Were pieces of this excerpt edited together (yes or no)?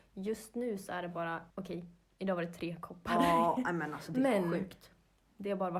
yes